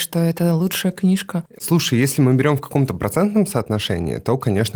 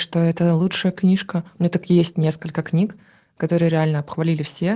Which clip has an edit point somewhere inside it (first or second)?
first